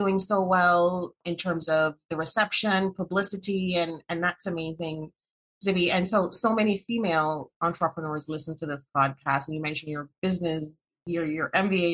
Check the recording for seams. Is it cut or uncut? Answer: uncut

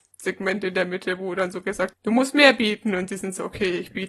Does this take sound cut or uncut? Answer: cut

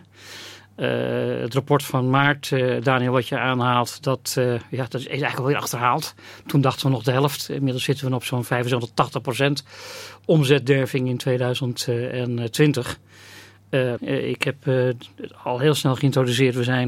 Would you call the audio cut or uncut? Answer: cut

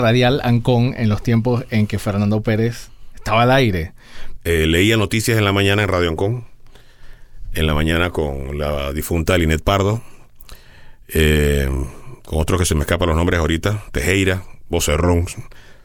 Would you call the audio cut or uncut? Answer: cut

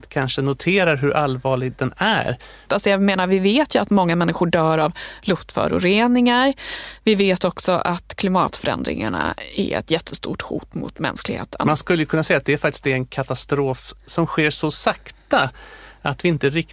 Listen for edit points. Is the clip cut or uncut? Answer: cut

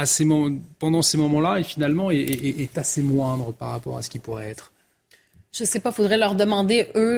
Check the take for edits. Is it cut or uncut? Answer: uncut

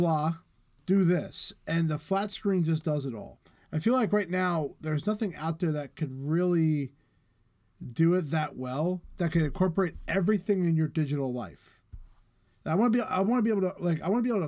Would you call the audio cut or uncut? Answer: uncut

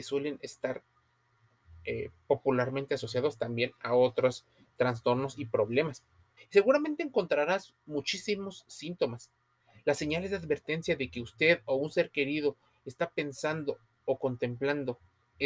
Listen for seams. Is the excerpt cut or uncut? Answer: cut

